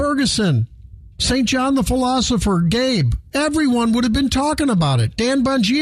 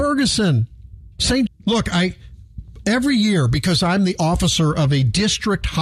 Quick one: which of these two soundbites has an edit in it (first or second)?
second